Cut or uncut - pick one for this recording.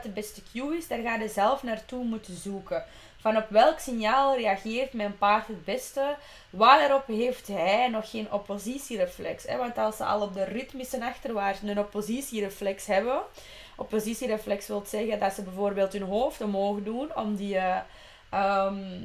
uncut